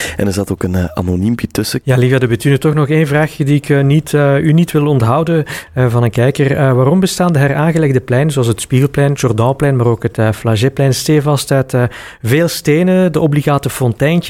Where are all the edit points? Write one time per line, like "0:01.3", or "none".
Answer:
none

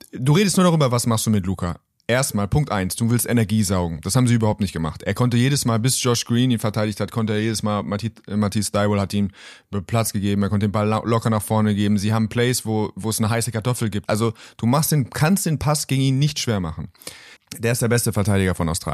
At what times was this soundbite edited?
0:14.1
0:17.4

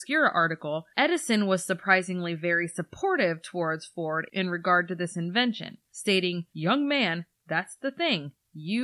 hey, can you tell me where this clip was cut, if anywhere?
none

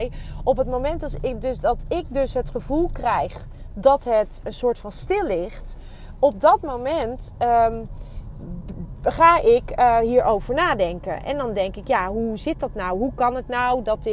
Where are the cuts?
0:04.4

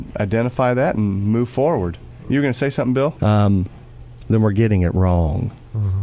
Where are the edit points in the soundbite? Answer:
0:03.2
0:04.2

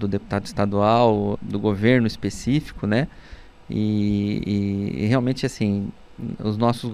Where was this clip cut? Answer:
0:01.4

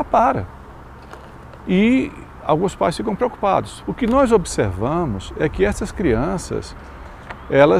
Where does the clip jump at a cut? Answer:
0:03.8

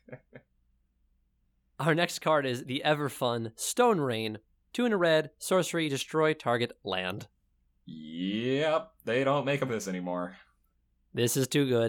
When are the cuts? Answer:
0:09.7

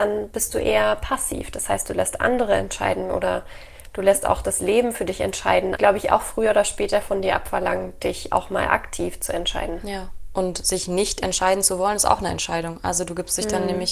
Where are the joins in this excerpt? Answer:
0:05.8

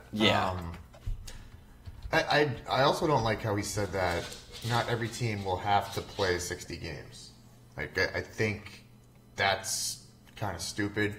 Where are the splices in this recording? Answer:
none

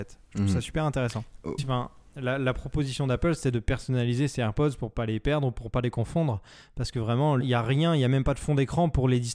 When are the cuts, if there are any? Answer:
0:01.6
0:07.4

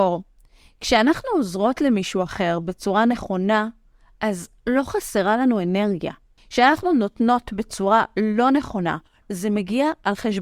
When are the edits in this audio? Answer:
0:06.4
0:09.2

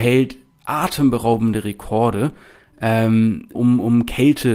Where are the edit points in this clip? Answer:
0:03.6

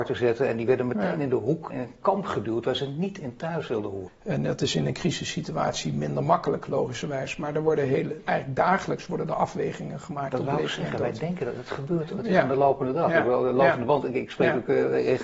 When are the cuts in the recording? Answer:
0:01.7
0:04.1

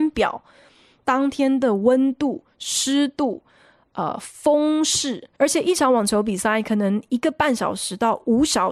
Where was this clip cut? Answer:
0:05.4

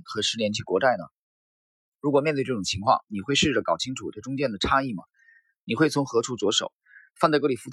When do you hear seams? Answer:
none

